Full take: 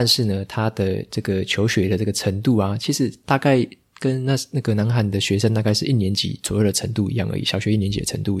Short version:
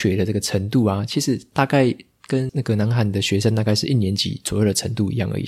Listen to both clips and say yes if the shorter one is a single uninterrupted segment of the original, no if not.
no